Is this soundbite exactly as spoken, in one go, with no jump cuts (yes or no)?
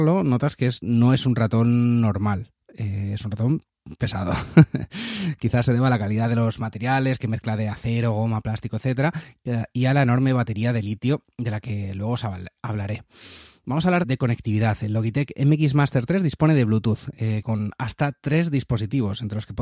no